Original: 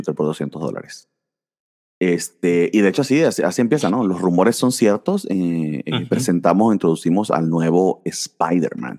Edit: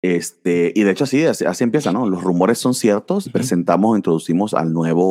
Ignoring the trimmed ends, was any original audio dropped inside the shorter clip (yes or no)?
yes